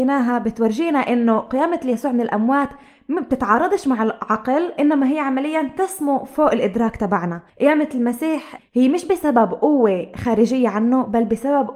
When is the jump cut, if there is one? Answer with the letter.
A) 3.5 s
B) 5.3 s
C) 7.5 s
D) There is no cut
C